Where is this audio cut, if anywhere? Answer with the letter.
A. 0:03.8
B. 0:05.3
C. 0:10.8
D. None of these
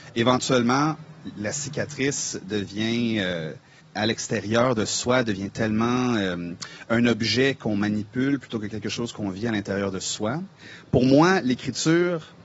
A